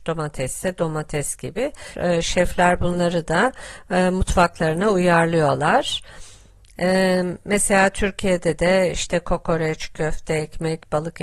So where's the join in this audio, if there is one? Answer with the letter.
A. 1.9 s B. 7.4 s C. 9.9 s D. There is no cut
A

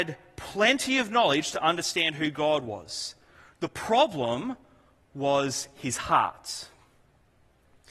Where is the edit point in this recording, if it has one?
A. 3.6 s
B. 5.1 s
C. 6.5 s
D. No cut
D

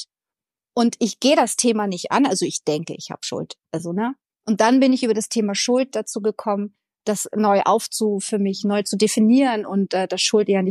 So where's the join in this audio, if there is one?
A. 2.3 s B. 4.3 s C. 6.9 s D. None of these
B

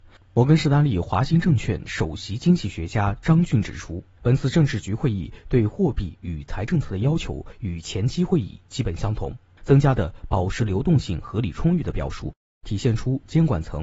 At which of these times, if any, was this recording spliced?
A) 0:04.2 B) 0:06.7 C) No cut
B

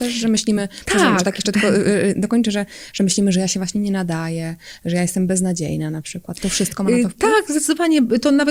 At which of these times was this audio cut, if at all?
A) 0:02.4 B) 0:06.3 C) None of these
C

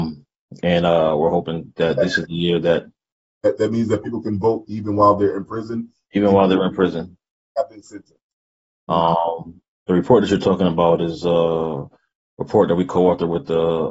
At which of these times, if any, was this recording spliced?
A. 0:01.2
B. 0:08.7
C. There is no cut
B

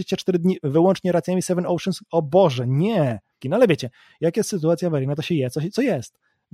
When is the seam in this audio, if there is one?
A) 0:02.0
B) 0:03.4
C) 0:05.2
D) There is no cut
B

